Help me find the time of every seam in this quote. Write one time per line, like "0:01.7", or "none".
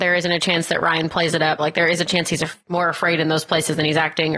0:01.6